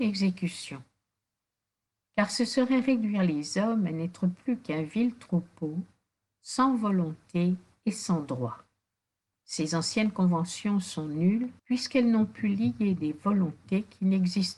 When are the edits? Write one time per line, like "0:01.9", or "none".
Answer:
0:09.3
0:11.6